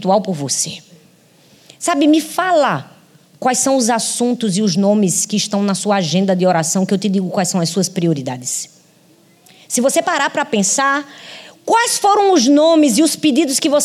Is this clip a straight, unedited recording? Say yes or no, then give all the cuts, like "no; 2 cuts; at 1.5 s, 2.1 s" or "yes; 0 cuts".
yes; 0 cuts